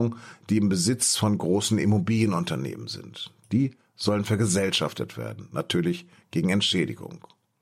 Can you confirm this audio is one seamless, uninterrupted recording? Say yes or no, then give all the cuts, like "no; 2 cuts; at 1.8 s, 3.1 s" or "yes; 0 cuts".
yes; 0 cuts